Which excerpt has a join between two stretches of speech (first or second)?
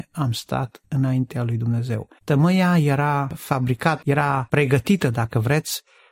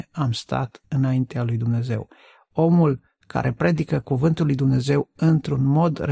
first